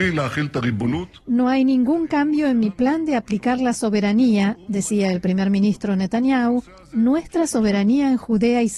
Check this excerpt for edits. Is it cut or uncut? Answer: uncut